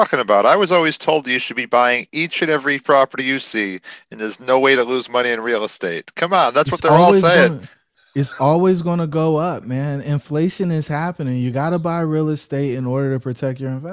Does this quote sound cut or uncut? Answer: uncut